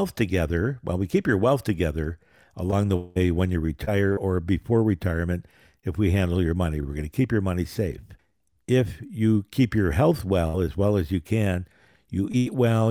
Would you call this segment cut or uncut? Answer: uncut